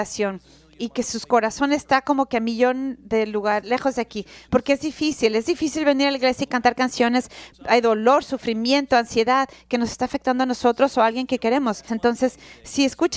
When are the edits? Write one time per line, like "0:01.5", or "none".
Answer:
0:03.6
0:07.5
0:11.9